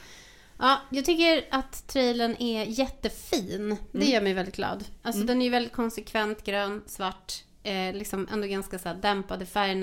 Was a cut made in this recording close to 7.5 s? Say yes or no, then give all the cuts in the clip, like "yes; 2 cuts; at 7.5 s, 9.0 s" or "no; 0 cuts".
no; 0 cuts